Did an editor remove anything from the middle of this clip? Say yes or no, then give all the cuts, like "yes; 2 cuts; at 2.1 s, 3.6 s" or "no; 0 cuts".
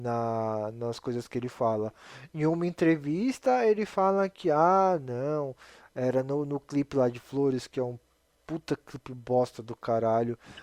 no; 0 cuts